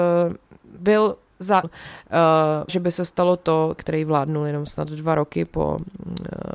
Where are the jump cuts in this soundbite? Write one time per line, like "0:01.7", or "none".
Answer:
0:01.6
0:02.7
0:03.8